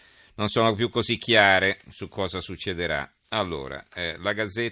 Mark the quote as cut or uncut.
cut